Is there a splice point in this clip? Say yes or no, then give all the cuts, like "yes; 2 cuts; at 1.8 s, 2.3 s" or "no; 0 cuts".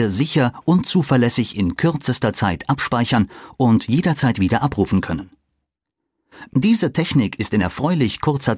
yes; 1 cut; at 6.5 s